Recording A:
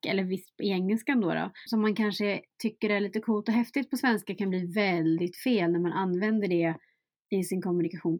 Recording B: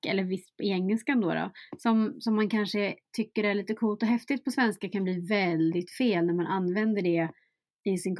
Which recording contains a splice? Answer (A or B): A